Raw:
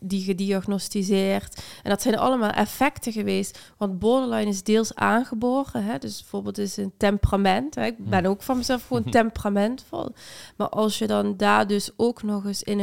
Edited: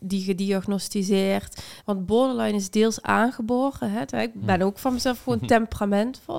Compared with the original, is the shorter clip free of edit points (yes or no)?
no